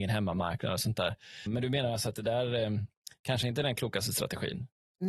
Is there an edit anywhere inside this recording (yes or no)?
yes